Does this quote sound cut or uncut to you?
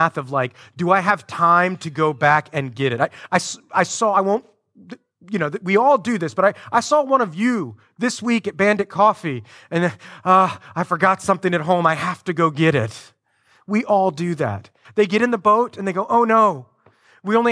cut